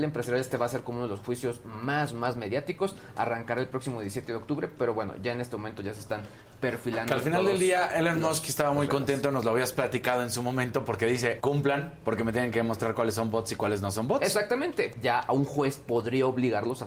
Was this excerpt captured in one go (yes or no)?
no